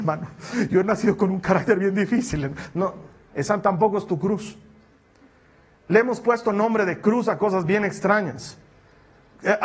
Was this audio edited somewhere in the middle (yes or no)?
no